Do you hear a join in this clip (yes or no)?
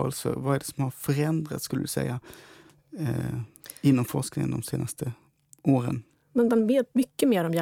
no